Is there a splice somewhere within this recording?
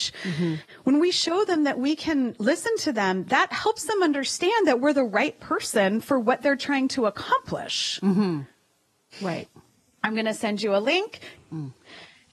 yes; 2 cuts; at 9.1 s, 11.3 s

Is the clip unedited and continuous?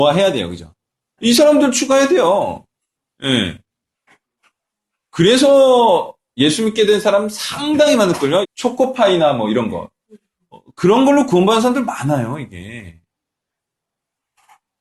no; 2 cuts; at 1.2 s, 8.4 s

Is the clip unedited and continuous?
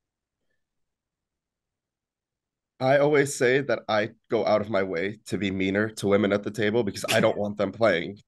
yes; 0 cuts

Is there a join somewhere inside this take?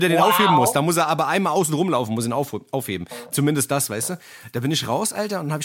no; 0 cuts

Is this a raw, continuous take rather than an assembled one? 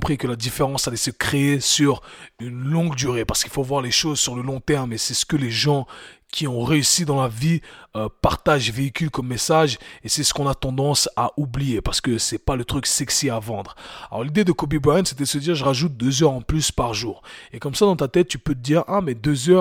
yes; 0 cuts

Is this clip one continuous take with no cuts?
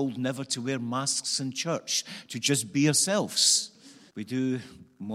no; 1 cut; at 4.1 s

